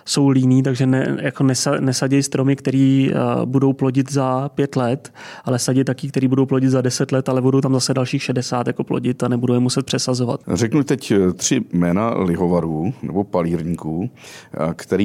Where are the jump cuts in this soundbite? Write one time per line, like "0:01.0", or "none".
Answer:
0:10.4